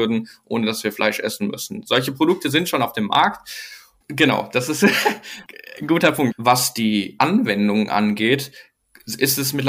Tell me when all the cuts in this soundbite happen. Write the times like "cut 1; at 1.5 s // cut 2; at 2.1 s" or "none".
cut 1; at 4.0 s // cut 2; at 6.3 s